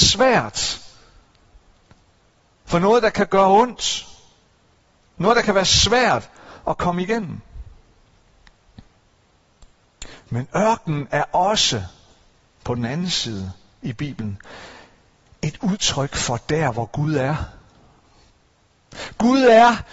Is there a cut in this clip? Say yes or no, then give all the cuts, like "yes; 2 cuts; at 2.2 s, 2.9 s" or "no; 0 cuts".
no; 0 cuts